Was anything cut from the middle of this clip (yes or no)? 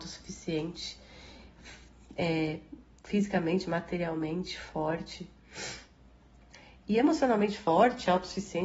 no